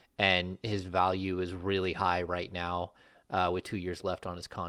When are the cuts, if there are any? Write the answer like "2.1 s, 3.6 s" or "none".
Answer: none